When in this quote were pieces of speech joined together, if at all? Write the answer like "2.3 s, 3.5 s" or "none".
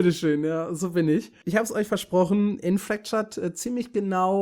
1.4 s